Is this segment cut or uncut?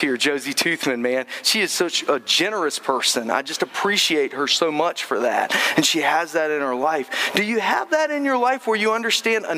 uncut